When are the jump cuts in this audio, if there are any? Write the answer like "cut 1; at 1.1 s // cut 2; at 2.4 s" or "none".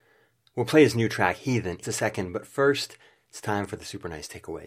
cut 1; at 1.8 s